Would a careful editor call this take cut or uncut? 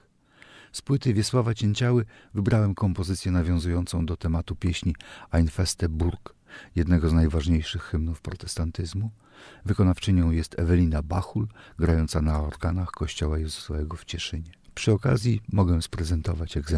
uncut